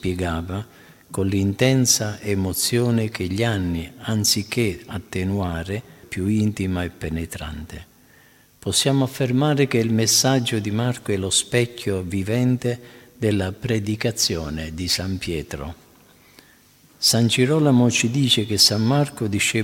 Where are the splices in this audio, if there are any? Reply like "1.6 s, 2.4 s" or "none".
6.0 s